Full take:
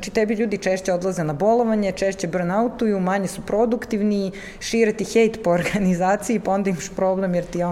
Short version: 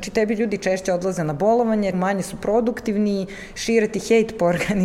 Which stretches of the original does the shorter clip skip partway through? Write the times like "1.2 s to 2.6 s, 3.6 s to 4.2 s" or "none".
1.9 s to 3.0 s